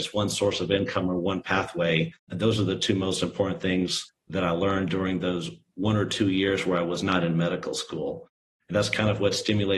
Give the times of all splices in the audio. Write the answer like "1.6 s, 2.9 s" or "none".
2.2 s